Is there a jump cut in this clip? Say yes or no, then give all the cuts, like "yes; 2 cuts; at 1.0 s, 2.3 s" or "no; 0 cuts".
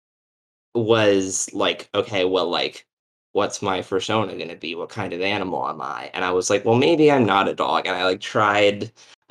no; 0 cuts